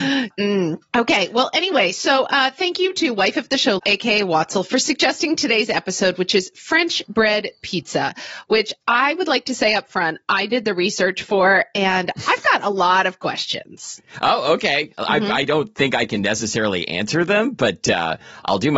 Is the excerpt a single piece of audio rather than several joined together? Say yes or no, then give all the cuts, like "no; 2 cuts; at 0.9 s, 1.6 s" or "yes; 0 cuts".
no; 1 cut; at 3.8 s